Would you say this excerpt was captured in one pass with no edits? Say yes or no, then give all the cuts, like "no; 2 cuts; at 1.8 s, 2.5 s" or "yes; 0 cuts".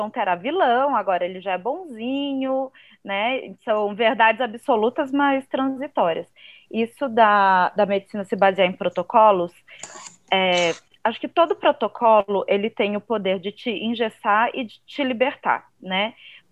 yes; 0 cuts